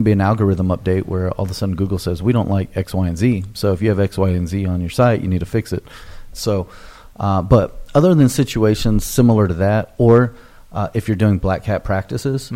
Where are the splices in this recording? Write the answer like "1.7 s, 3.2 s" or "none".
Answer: 6.3 s